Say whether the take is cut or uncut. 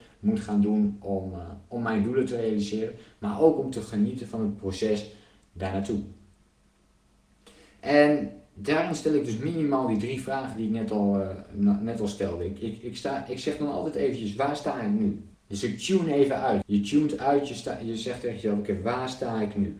cut